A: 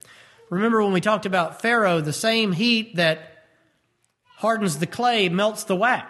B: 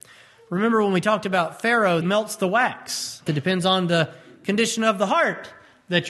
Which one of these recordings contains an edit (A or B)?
B